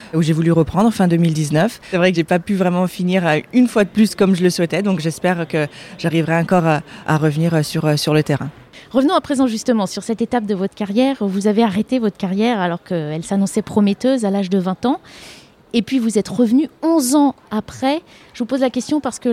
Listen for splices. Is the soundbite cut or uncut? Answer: uncut